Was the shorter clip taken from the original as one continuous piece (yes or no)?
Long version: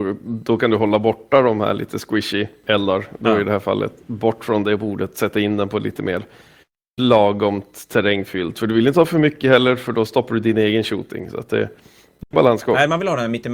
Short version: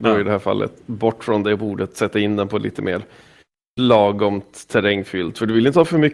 yes